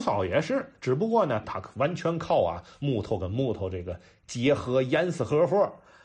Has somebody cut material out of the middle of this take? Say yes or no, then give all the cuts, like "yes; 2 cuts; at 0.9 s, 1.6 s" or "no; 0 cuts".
yes; 1 cut; at 1.4 s